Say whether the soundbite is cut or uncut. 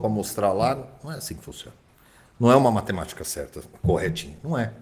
uncut